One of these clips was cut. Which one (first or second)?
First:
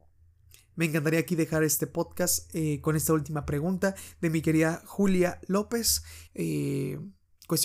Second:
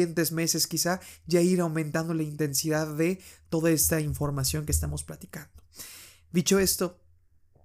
first